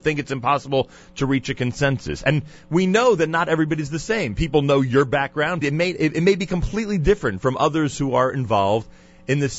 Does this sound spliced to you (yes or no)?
yes